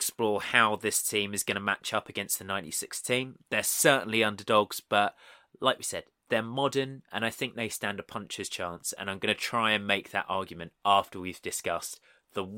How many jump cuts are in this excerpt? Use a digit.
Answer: 0